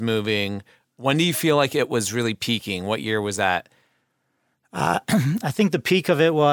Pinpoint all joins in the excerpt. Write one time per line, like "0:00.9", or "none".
none

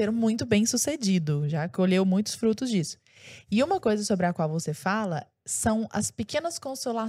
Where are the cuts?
none

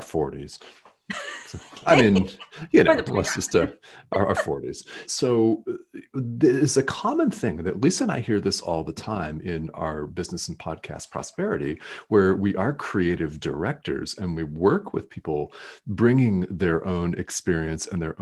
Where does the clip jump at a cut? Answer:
0:05.0

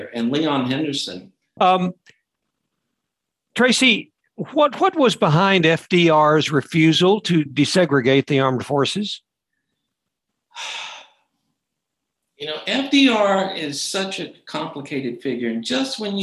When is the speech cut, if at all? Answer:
0:01.6

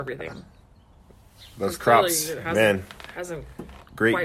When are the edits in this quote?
none

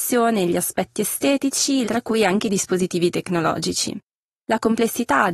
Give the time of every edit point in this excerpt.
0:01.8

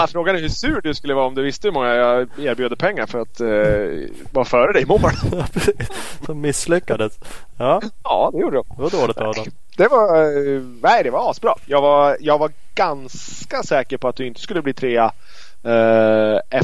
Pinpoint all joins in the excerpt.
none

